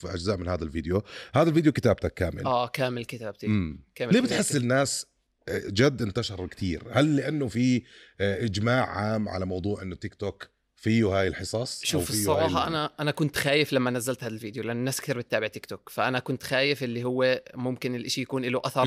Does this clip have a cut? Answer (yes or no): no